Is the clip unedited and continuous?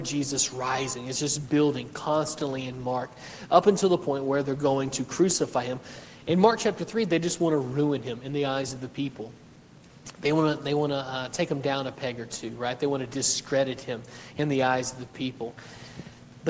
yes; 0 cuts

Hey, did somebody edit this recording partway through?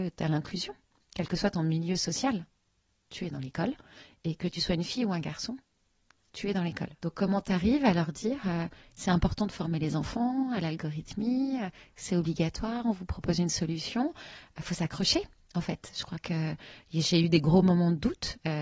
yes; 1 cut; at 7.0 s

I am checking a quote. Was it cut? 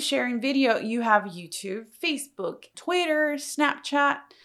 yes; 1 cut; at 2.7 s

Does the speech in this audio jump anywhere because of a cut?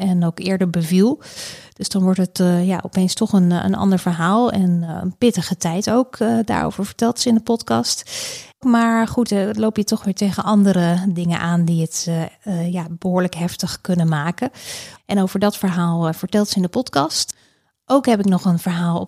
yes; 2 cuts; at 8.6 s, 14.9 s

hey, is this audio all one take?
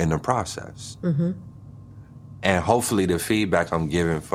yes; 0 cuts

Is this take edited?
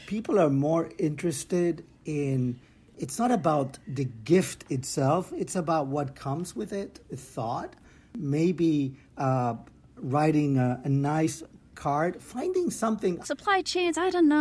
yes; 1 cut; at 13.2 s

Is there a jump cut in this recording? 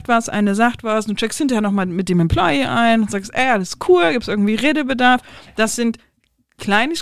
no; 0 cuts

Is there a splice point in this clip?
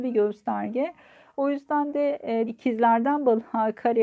yes; 1 cut; at 2.5 s

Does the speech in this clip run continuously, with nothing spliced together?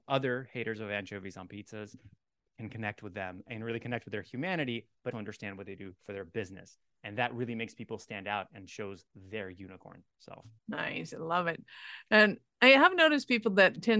no; 2 cuts; at 5.1 s, 10.6 s

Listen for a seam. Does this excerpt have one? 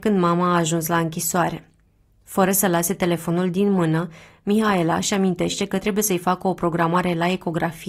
no; 0 cuts

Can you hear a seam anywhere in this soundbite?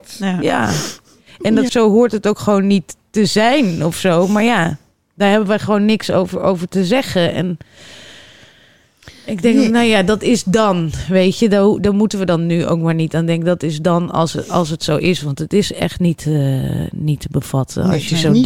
yes; 1 cut; at 1.7 s

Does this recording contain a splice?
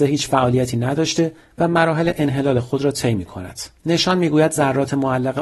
yes; 1 cut; at 3.8 s

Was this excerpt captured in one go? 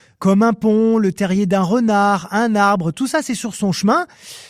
yes; 0 cuts

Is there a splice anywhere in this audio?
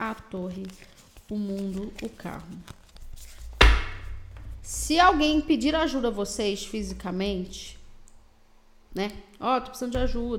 no; 0 cuts

